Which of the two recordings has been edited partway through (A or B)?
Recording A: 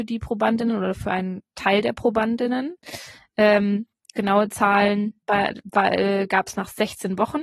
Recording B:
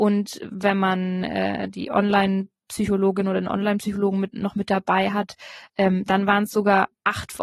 A